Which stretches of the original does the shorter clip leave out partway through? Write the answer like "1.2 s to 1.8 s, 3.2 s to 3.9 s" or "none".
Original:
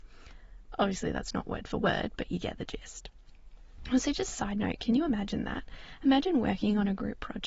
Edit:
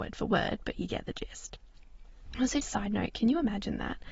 4.1 s to 4.3 s